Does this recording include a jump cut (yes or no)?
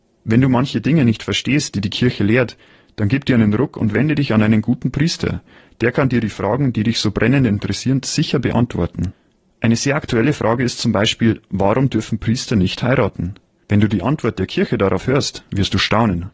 no